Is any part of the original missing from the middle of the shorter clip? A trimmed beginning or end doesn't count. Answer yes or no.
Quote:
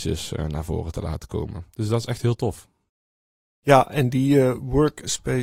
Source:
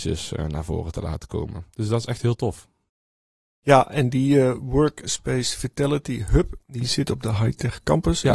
no